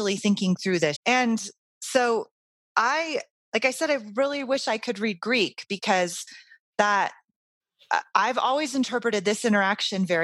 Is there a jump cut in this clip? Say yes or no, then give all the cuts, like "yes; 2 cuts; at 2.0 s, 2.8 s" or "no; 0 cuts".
yes; 1 cut; at 1.0 s